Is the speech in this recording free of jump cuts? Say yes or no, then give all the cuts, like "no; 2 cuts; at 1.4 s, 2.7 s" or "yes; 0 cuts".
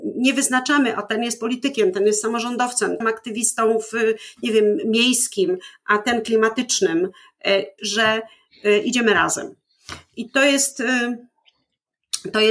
no; 2 cuts; at 3.0 s, 7.8 s